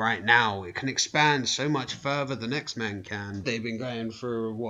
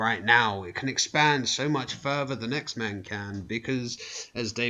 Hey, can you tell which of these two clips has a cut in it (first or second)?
first